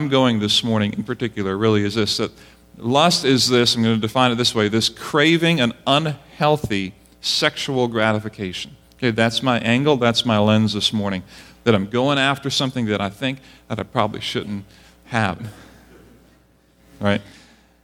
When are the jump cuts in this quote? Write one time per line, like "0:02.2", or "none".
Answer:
0:11.5
0:15.4